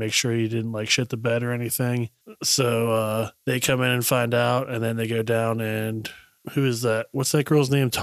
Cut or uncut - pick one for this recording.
uncut